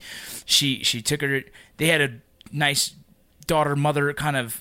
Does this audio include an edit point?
no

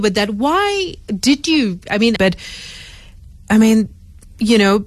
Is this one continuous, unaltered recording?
no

